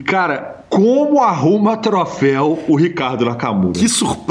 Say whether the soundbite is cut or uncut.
uncut